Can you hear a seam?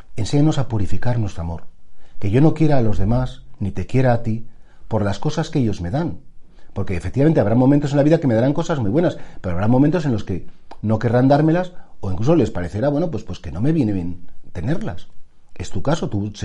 no; 0 cuts

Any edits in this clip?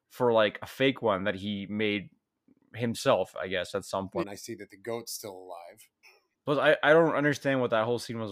yes; 2 cuts; at 4.2 s, 6.0 s

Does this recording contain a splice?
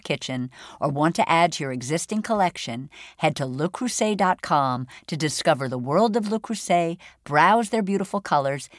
no; 0 cuts

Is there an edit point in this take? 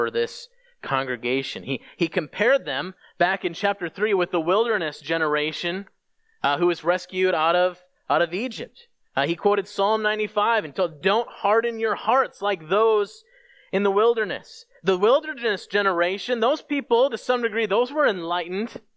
yes; 1 cut; at 11.0 s

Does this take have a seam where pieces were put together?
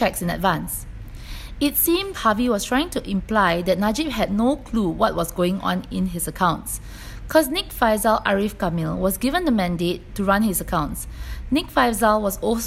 yes; 1 cut; at 2.1 s

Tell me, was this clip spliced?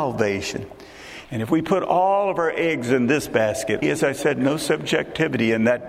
yes; 2 cuts; at 1.2 s, 3.8 s

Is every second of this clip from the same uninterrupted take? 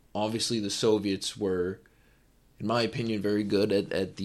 yes; 0 cuts

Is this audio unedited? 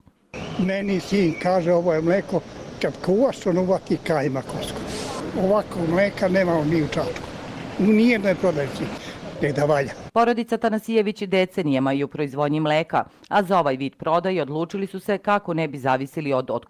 no; 2 cuts; at 2.8 s, 9.3 s

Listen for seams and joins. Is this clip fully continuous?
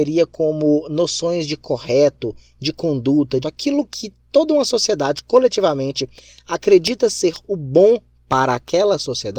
no; 1 cut; at 3.4 s

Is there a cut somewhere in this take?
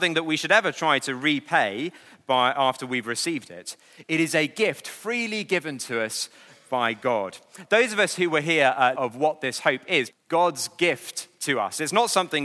yes; 2 cuts; at 8.9 s, 10.1 s

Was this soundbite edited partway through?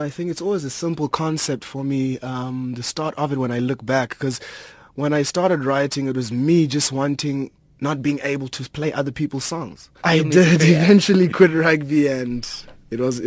yes; 1 cut; at 10.0 s

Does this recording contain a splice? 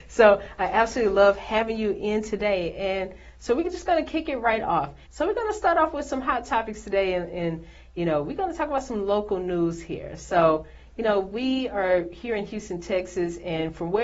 yes; 1 cut; at 5.1 s

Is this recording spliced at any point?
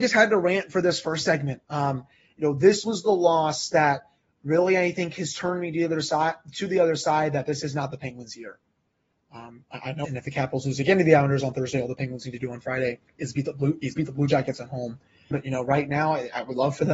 yes; 3 cuts; at 10.0 s, 13.1 s, 15.3 s

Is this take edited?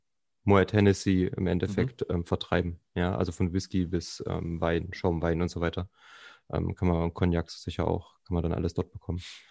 no; 0 cuts

